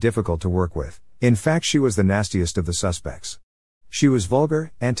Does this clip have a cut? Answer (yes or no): no